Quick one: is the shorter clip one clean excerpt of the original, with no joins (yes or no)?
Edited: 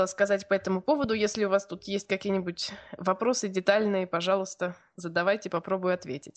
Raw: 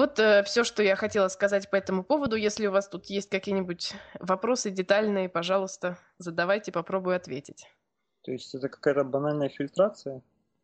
yes